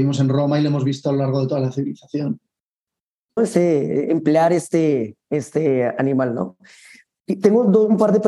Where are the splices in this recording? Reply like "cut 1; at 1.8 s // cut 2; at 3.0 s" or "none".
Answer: cut 1; at 3.4 s

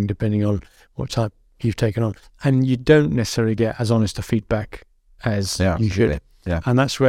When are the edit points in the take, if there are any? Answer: cut 1; at 2.2 s

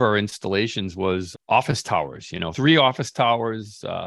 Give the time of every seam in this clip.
cut 1; at 1.3 s

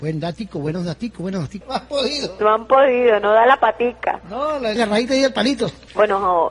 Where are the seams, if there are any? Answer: cut 1; at 1.6 s // cut 2; at 4.8 s

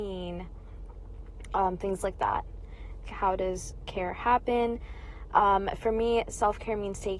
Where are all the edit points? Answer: cut 1; at 3.0 s

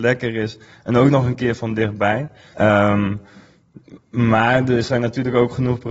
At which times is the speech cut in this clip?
cut 1; at 2.5 s

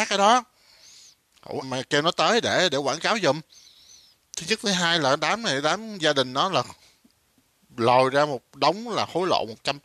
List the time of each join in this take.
cut 1; at 1.6 s

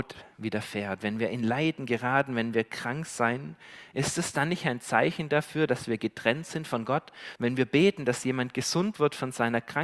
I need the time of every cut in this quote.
cut 1; at 7.4 s

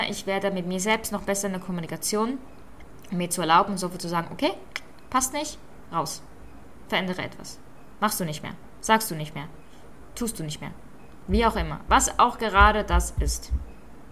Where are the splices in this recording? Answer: none

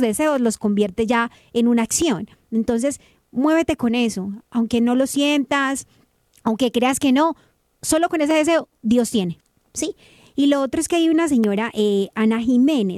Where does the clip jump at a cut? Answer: none

